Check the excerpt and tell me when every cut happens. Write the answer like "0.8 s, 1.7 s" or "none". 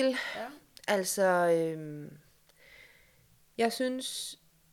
none